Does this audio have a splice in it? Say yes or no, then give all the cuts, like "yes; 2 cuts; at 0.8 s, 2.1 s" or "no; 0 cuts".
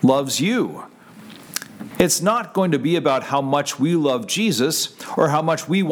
yes; 1 cut; at 1.9 s